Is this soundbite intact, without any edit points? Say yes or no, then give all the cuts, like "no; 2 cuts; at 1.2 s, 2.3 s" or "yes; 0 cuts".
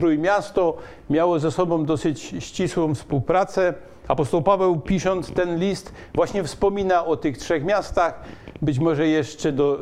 yes; 0 cuts